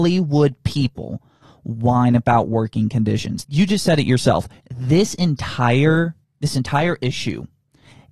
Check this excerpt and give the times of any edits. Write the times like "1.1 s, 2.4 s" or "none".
3.4 s, 4.6 s, 6.2 s

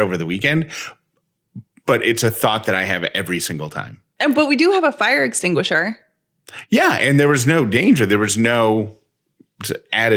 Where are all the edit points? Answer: none

